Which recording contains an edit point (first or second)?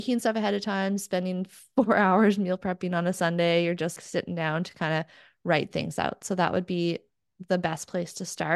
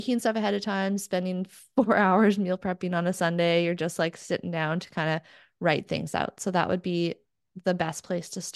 first